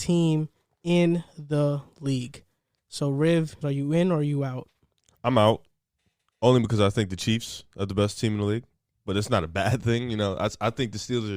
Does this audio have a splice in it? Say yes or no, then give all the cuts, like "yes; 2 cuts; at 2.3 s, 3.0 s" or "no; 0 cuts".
yes; 1 cut; at 3.6 s